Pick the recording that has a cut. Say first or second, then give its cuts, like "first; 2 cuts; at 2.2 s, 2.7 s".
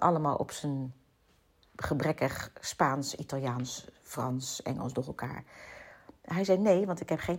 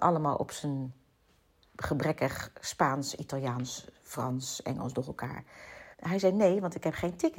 second; 1 cut; at 5.9 s